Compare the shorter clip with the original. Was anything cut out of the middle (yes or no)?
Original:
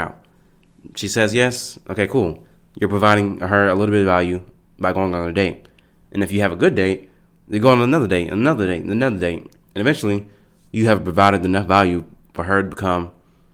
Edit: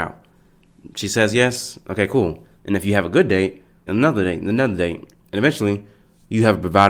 yes